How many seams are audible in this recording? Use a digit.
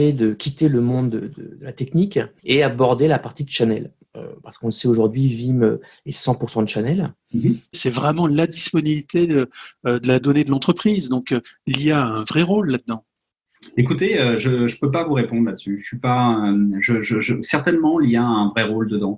1